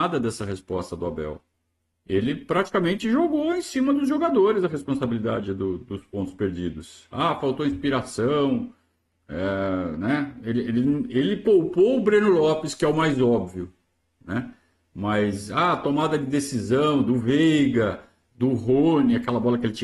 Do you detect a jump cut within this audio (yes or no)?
no